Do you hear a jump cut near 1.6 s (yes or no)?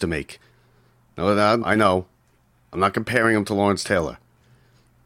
yes